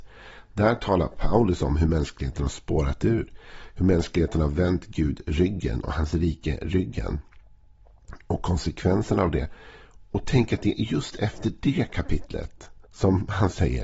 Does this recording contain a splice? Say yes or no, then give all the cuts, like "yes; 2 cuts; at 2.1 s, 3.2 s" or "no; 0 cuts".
yes; 1 cut; at 12.8 s